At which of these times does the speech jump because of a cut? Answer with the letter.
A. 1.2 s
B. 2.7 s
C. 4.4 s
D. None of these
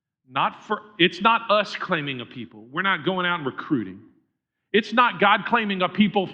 D